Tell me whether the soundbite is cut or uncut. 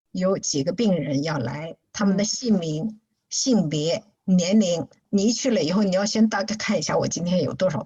cut